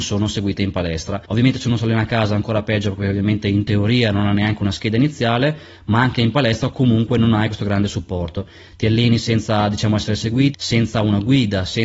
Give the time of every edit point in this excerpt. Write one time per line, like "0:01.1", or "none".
0:01.3
0:10.5